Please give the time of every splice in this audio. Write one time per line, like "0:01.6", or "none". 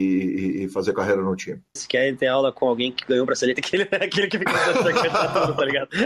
0:01.8